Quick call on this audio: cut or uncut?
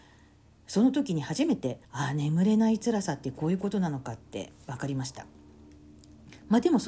cut